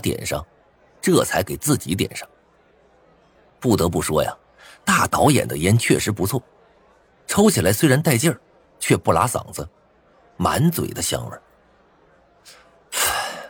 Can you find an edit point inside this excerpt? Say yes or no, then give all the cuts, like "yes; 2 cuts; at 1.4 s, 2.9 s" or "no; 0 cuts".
yes; 1 cut; at 10.3 s